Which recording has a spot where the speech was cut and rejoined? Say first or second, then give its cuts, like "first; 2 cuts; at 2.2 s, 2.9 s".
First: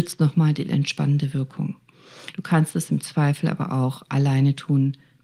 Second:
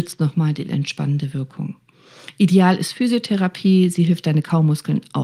first; 1 cut; at 2.3 s